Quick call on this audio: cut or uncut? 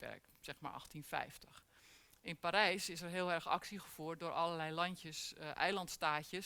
uncut